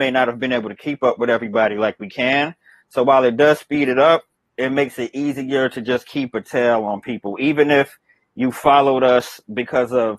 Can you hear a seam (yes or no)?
no